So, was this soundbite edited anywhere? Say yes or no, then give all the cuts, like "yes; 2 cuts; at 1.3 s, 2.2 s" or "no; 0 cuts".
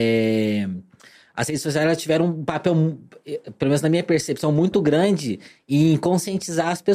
no; 0 cuts